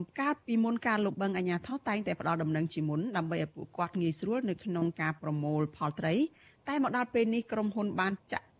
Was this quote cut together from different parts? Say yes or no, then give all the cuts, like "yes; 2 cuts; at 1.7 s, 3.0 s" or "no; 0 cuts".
no; 0 cuts